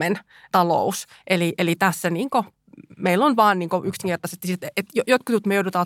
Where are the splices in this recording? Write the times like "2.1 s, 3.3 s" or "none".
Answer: none